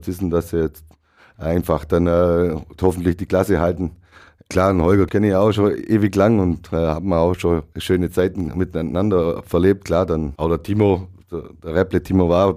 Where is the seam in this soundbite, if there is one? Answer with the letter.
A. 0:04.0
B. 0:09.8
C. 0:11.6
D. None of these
D